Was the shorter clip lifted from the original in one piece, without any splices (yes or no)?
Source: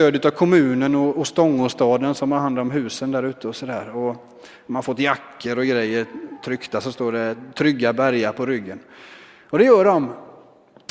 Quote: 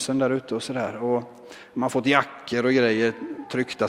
yes